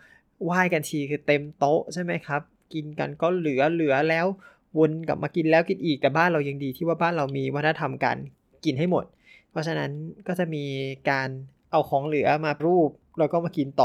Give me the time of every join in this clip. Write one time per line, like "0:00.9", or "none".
0:12.6